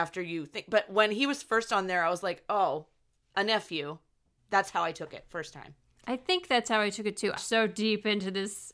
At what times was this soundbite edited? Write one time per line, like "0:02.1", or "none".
0:04.4
0:07.4